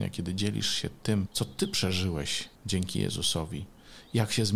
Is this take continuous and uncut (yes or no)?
no